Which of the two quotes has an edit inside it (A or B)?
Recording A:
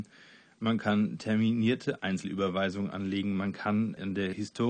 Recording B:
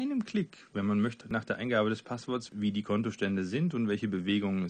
B